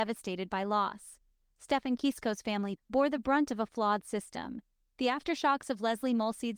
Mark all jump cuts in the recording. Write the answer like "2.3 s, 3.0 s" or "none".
2.8 s, 4.8 s